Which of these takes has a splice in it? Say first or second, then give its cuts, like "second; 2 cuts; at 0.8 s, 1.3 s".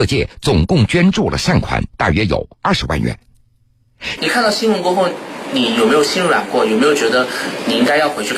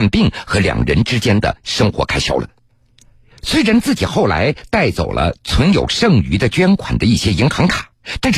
first; 1 cut; at 4.2 s